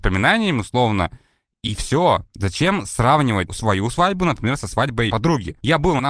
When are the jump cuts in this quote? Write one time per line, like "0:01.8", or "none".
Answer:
0:03.5